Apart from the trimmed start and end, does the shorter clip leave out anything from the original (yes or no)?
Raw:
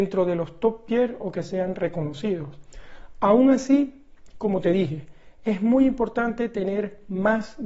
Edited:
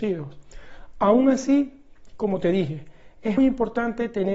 yes